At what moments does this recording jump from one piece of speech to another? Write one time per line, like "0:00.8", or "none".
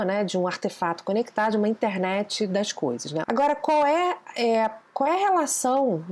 0:03.2